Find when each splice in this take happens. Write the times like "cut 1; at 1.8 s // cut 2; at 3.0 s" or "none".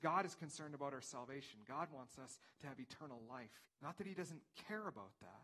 cut 1; at 3.6 s